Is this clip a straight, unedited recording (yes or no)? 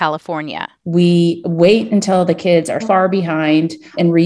no